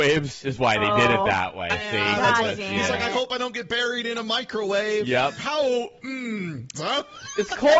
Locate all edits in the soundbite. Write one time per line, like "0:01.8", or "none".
0:05.4
0:06.7